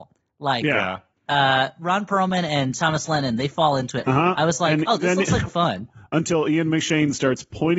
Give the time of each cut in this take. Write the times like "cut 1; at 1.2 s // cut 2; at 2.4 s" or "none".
cut 1; at 1.1 s // cut 2; at 4.0 s // cut 3; at 5.5 s